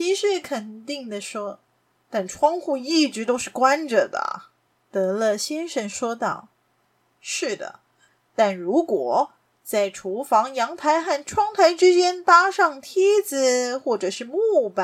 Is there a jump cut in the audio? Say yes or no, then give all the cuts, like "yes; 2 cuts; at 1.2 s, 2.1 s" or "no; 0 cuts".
no; 0 cuts